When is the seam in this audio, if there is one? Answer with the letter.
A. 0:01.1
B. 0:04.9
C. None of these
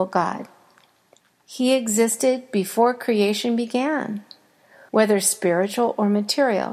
B